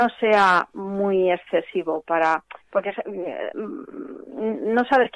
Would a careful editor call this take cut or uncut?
uncut